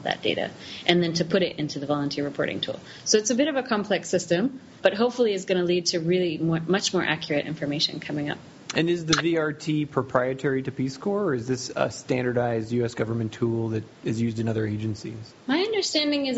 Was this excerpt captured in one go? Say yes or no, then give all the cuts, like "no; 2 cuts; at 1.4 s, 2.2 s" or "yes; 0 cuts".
no; 1 cut; at 15.4 s